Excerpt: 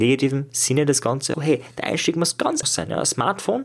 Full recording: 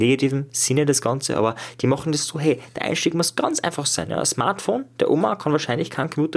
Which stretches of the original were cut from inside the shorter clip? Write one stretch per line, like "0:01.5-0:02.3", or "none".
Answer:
0:01.3-0:02.3
0:03.6-0:03.8

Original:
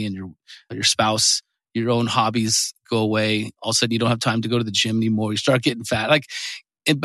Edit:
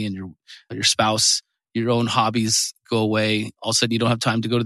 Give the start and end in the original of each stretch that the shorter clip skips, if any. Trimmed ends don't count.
none

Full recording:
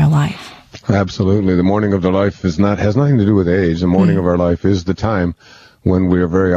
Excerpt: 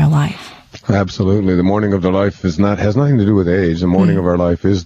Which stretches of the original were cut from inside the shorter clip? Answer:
none

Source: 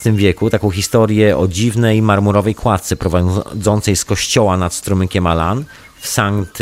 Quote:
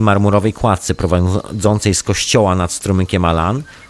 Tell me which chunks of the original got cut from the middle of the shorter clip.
none

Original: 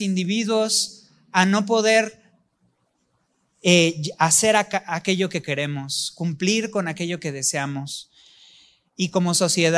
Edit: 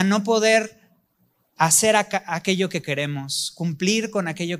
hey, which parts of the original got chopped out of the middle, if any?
0:03.0-0:04.2

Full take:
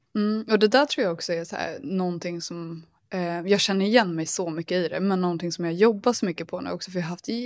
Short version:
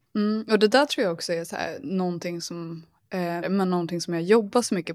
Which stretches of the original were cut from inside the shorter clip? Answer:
0:03.4-0:04.9

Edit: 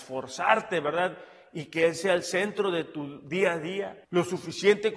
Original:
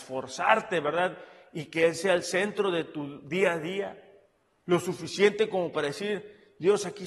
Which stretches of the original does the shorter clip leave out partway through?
0:04.0-0:04.6

